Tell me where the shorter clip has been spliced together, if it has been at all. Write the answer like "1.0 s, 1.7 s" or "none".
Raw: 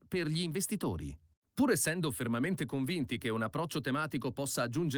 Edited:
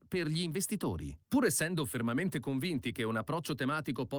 1.2 s